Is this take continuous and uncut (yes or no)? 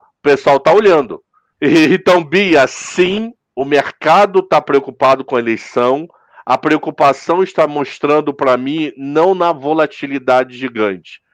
no